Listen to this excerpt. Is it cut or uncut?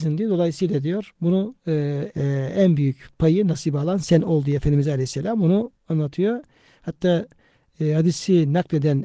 cut